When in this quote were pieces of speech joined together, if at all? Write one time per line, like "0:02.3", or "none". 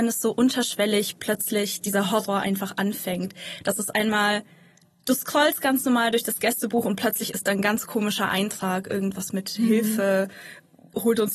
none